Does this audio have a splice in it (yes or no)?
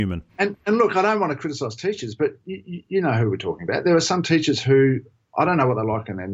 no